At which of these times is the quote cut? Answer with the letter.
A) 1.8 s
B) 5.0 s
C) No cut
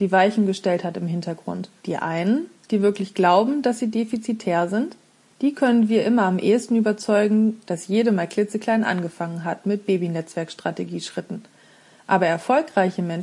A